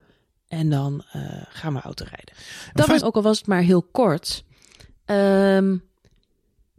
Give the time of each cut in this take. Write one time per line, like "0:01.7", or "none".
0:03.0